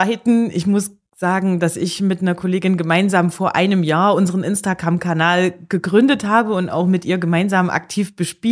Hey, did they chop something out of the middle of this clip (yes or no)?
no